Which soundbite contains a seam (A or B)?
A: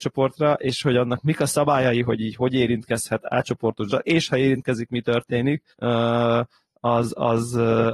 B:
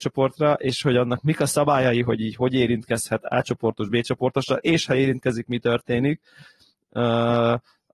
A